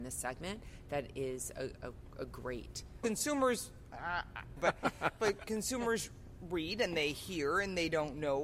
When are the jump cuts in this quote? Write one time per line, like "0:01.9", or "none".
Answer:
0:03.0
0:04.6